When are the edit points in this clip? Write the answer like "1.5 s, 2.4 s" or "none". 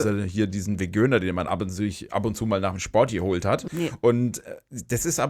3.7 s